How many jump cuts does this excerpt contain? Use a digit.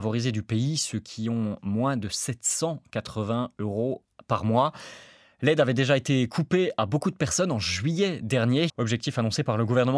1